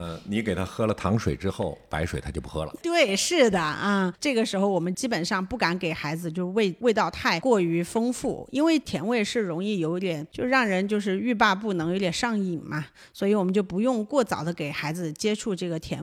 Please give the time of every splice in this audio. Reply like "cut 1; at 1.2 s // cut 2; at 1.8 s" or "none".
none